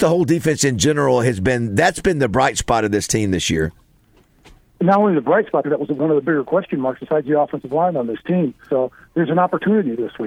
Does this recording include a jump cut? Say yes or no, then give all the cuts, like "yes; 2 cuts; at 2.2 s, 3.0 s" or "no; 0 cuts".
yes; 2 cuts; at 5.6 s, 8.7 s